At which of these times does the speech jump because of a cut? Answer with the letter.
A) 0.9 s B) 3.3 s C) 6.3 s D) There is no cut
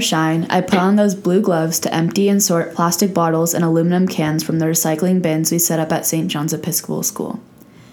D